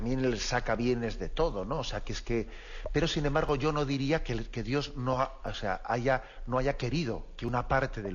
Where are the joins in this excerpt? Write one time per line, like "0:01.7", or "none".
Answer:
none